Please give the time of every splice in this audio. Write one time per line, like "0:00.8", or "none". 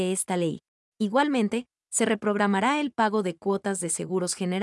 0:00.9